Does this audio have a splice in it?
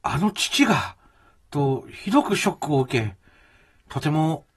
no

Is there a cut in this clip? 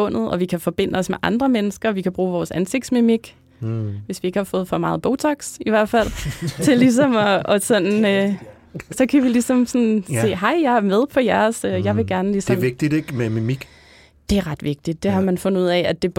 no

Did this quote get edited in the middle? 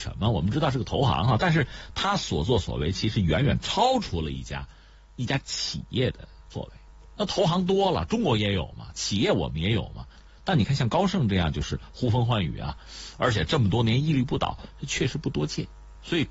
no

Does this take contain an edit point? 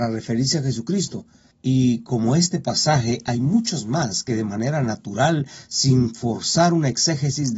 yes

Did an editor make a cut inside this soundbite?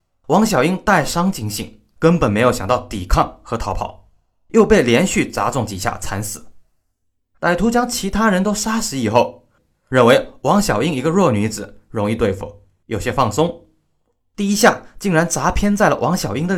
yes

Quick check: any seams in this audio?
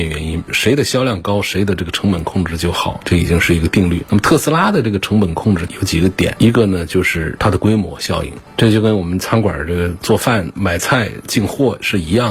no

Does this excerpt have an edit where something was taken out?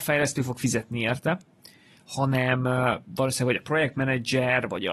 no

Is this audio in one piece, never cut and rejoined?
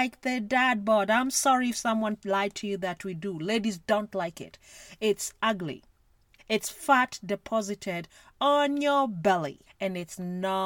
no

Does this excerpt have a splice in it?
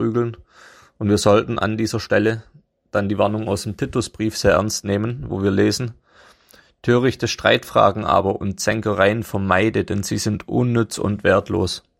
no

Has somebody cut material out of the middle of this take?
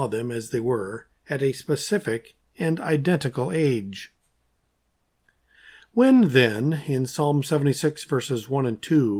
no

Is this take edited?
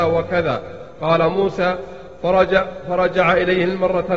no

